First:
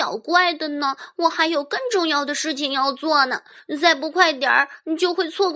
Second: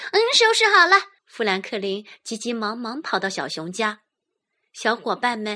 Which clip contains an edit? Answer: second; 1 cut; at 1.2 s

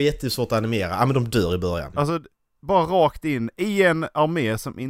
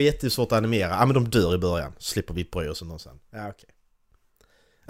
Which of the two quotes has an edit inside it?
first; 1 cut; at 1.9 s

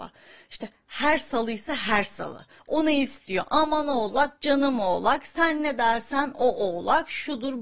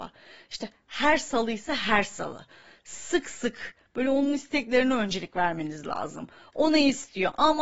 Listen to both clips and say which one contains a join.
first; 1 cut; at 2.6 s

